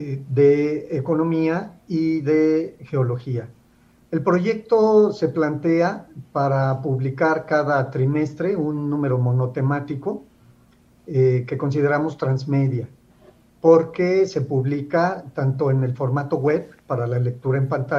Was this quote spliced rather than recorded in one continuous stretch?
no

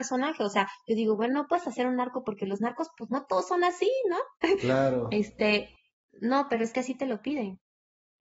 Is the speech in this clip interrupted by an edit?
no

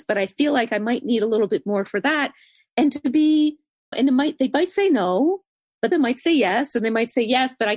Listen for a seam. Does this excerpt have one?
yes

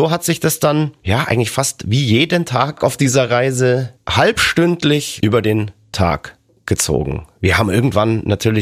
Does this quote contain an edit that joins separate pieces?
no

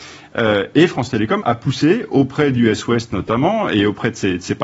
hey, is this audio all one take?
no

